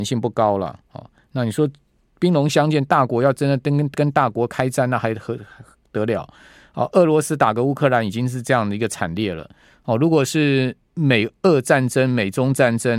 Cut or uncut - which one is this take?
uncut